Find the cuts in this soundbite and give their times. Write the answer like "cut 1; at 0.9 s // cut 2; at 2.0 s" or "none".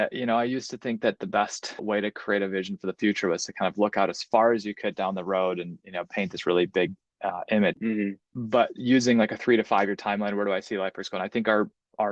cut 1; at 1.8 s // cut 2; at 7.7 s